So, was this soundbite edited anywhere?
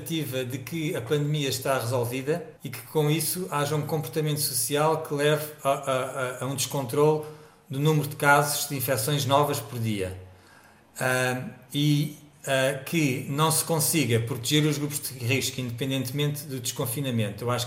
no; 0 cuts

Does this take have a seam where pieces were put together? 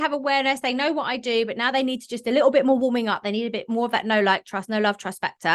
no; 0 cuts

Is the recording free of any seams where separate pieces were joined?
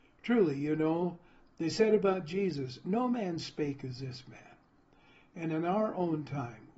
yes; 0 cuts

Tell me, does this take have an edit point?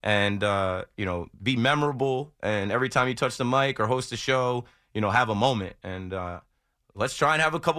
no; 0 cuts

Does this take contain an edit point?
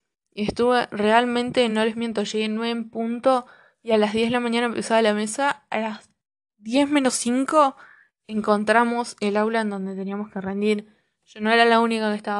no; 0 cuts

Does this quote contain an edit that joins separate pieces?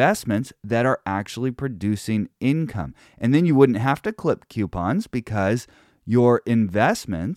no; 0 cuts

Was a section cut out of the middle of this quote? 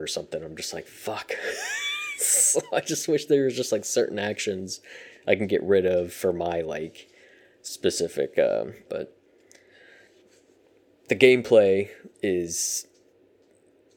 yes; 2 cuts; at 8.9 s, 12.1 s

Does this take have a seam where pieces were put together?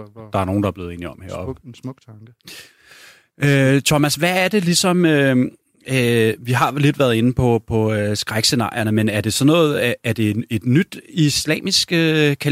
no; 0 cuts

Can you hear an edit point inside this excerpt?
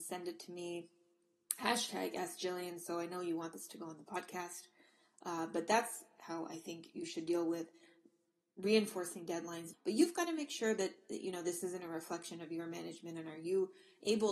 yes; 1 cut; at 9.7 s

